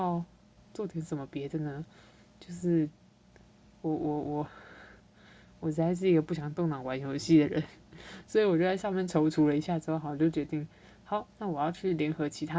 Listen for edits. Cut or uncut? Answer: uncut